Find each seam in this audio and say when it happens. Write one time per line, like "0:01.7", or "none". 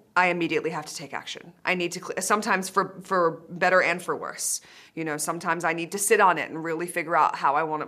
none